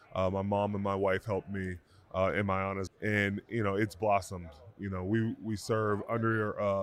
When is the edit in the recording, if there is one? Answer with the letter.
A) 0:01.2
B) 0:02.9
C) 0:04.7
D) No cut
B